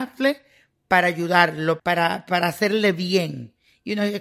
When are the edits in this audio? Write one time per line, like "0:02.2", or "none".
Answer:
0:01.8